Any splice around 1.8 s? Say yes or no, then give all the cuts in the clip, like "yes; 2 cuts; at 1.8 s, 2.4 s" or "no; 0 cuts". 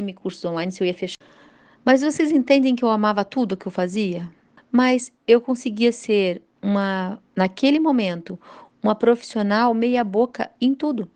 no; 1 cut; at 4.6 s